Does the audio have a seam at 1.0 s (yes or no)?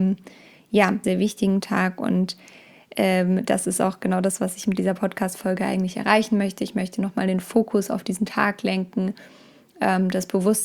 yes